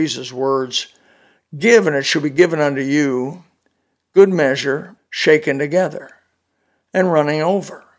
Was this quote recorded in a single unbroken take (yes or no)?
no